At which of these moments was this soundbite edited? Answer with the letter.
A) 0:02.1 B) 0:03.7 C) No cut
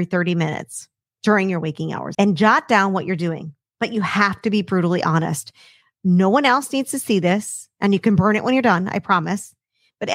A